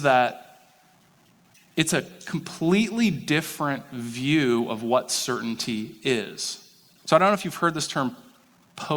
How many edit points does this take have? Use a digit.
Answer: 1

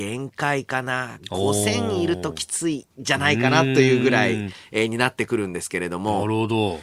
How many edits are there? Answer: 1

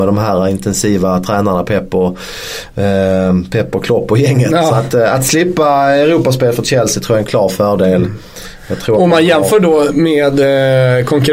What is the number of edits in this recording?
0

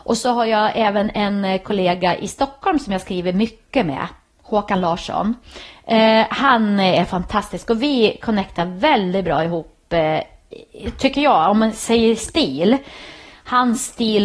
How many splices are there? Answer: 0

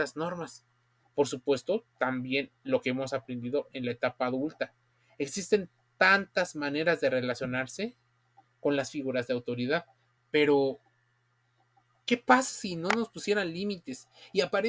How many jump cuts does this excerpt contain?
3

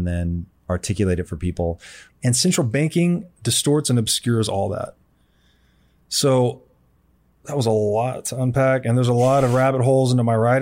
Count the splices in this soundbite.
1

